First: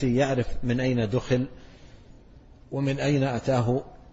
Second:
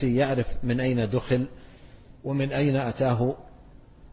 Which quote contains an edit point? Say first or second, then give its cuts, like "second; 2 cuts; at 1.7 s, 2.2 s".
second; 1 cut; at 2.2 s